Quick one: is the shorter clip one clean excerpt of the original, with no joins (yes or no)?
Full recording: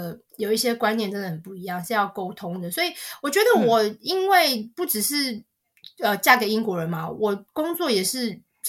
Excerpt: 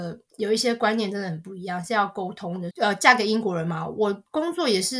no